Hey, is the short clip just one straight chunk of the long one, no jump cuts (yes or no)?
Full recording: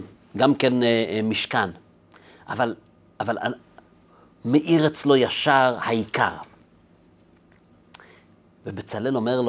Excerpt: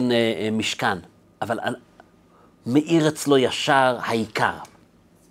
no